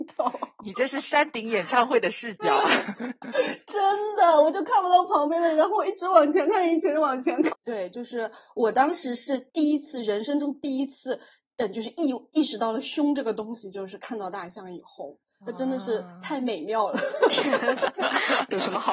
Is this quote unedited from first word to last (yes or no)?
no